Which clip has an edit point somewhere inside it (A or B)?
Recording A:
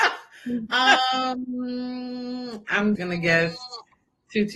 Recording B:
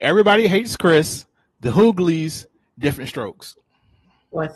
A